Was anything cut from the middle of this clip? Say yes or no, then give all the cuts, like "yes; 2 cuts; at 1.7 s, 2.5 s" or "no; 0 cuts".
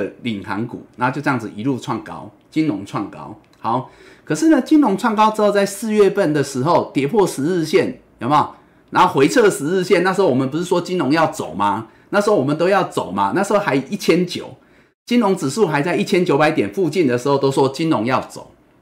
no; 0 cuts